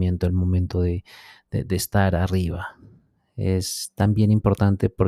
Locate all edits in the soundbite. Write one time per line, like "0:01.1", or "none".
none

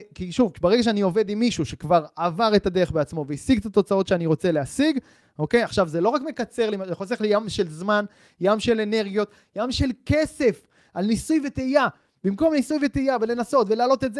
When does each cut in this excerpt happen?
0:05.2

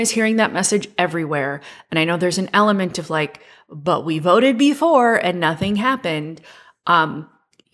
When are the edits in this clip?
none

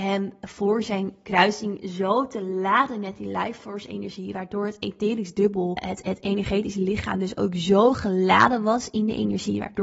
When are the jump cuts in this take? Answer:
0:05.8

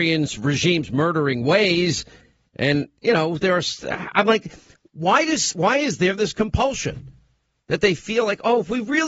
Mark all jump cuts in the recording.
none

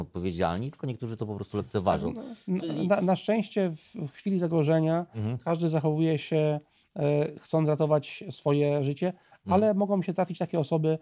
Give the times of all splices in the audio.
none

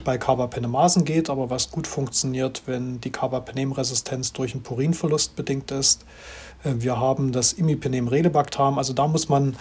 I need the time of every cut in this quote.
0:06.5

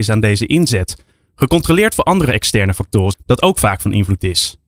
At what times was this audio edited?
0:03.1

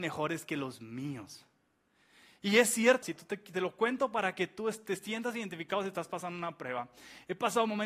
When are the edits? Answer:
0:03.0

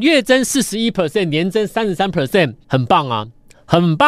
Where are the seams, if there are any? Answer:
0:02.6

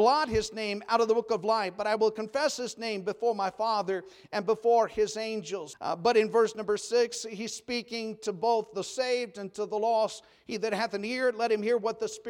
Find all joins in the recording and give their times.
0:05.7

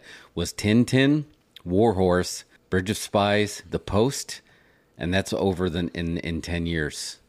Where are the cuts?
0:02.6
0:03.7

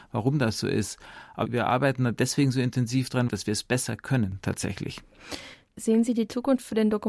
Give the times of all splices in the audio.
0:03.3
0:05.8

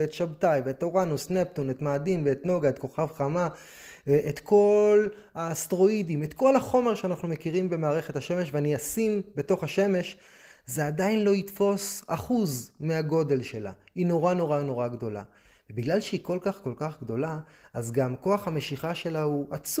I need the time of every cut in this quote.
none

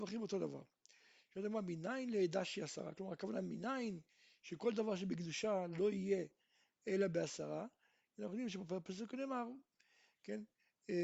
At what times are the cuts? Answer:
none

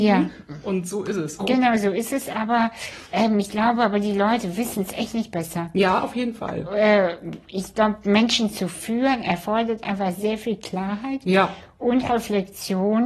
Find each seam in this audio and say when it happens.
0:01.4

